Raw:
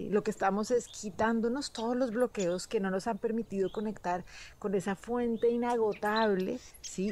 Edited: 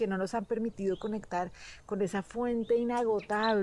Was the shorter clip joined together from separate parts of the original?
no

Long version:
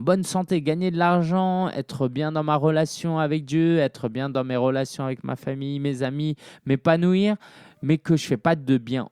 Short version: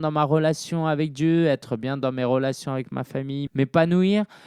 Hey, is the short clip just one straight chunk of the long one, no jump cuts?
no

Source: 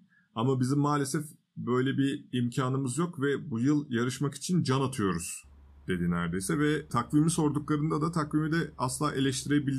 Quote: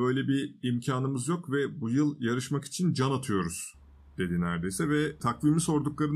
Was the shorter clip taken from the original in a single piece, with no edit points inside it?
yes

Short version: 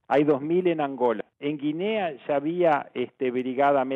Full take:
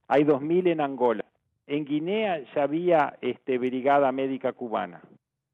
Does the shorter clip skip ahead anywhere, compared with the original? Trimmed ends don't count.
yes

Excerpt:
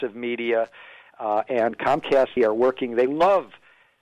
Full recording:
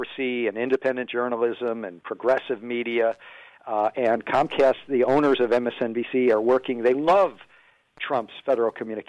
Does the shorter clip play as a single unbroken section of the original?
no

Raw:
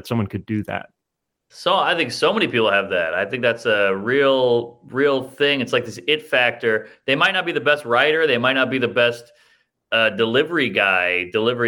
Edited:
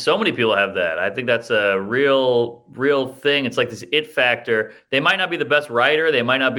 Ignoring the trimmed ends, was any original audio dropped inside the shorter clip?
no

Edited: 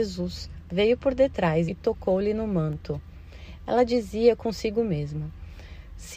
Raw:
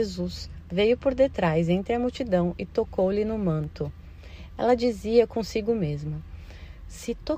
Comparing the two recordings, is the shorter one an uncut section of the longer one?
no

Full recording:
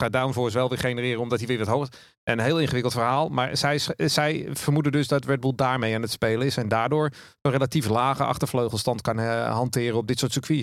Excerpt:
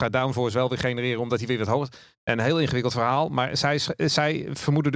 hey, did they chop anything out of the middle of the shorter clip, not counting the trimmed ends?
no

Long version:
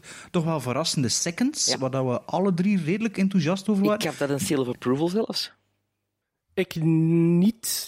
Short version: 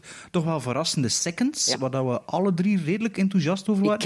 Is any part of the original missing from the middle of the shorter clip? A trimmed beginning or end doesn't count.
no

